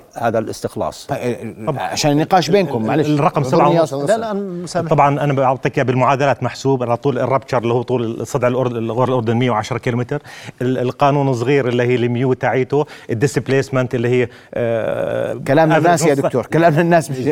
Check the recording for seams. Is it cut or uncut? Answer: uncut